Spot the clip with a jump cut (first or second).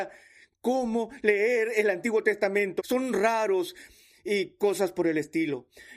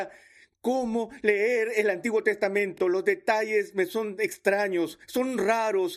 first